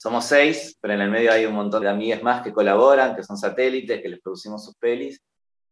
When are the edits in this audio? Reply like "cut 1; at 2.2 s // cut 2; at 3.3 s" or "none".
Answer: cut 1; at 1.8 s